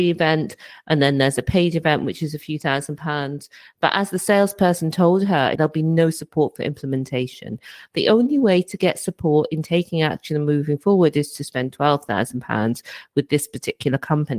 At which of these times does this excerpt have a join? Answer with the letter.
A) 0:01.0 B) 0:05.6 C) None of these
B